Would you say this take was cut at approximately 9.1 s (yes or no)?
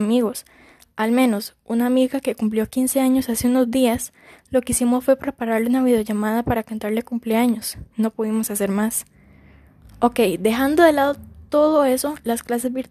no